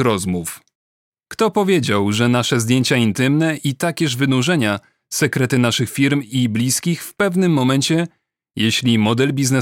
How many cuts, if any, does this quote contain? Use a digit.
0